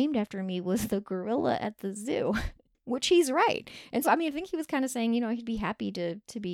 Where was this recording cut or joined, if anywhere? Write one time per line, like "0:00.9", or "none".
0:04.0